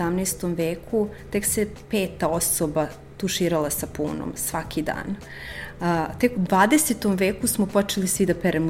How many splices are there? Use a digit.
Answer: 1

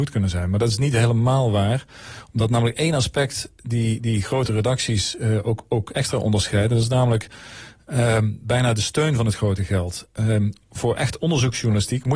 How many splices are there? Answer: 0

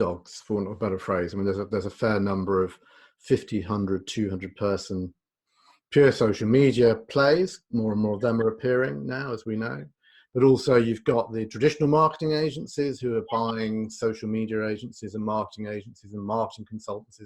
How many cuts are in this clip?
0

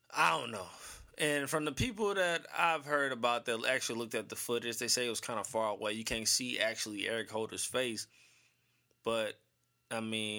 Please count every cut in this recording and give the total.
0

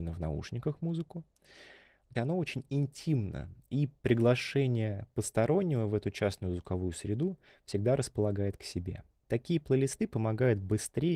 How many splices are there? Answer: 2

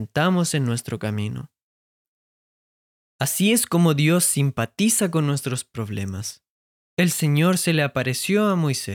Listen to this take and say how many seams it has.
1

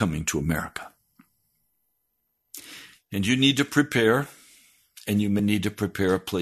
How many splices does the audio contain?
1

